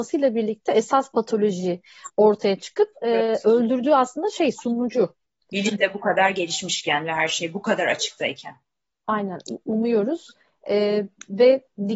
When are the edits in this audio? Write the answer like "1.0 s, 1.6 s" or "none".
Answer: 5.5 s